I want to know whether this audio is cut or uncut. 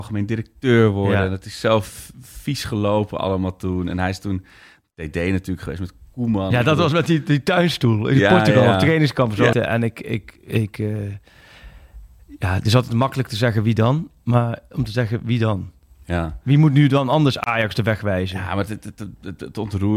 cut